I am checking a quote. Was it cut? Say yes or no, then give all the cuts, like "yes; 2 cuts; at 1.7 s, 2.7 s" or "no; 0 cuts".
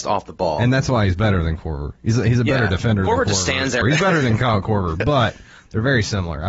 yes; 1 cut; at 3.8 s